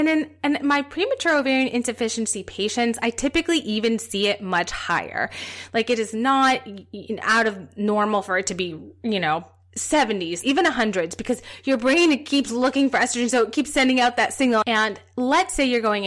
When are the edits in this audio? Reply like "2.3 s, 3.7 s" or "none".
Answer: 10.4 s, 14.6 s

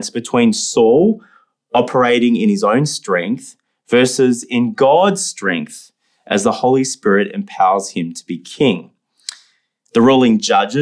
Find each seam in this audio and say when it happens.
9.9 s

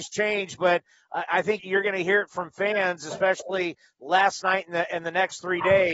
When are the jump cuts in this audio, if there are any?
1.6 s

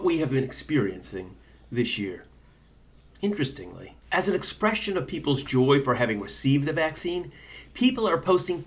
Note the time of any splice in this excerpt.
4.0 s

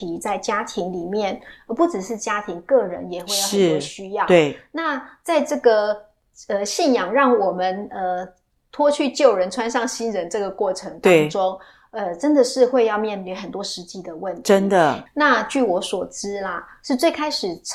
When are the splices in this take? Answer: 15.1 s

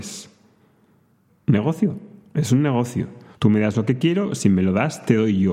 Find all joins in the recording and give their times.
1.3 s, 3.3 s

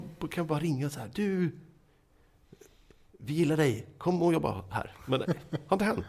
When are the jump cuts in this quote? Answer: none

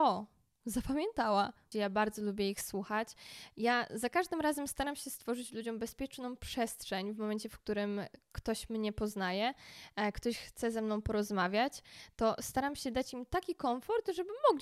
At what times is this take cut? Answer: 1.7 s

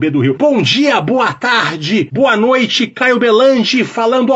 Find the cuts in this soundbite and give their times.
none

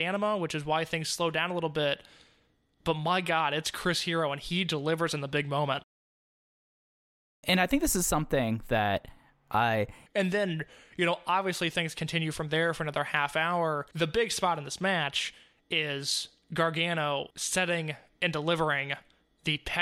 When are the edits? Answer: 10.1 s, 13.9 s, 17.3 s

